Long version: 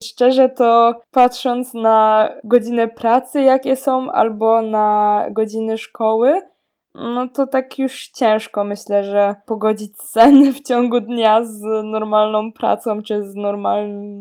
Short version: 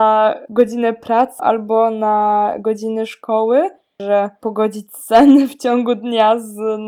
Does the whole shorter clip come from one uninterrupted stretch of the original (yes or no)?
no